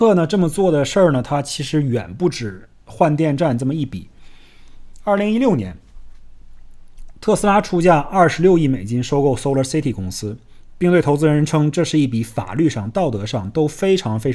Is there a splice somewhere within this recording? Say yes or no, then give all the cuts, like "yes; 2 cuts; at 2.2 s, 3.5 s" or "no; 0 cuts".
no; 0 cuts